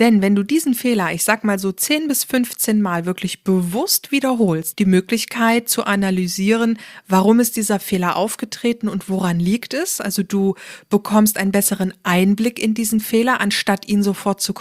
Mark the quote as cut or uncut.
cut